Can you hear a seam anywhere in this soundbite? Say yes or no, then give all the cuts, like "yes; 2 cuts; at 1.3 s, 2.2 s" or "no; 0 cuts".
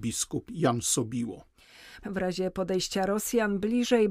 yes; 1 cut; at 2.0 s